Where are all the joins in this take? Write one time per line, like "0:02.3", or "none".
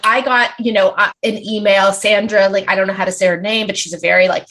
0:01.1

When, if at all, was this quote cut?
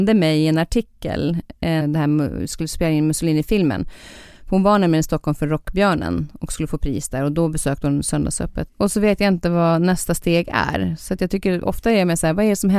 0:01.8
0:08.7

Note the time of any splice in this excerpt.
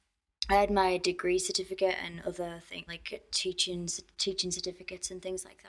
0:02.9

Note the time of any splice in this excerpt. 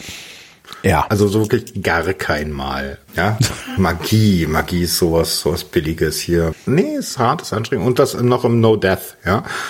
0:03.1
0:06.5

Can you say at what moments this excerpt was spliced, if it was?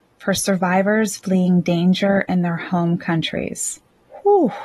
none

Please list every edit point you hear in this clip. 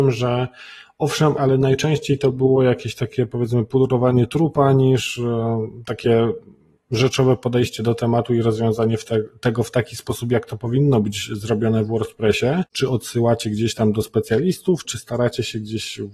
0:01.4
0:12.7
0:14.8

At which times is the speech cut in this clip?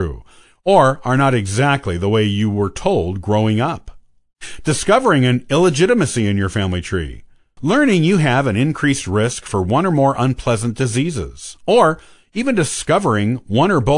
0:07.6

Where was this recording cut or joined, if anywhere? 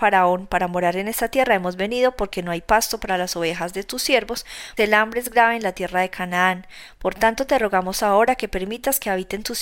0:04.8

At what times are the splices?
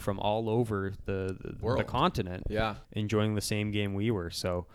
0:01.6
0:02.8

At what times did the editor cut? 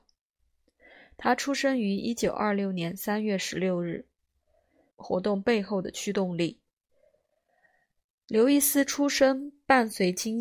0:04.9

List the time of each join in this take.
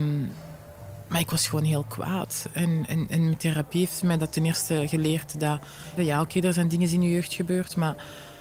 0:02.9
0:06.0

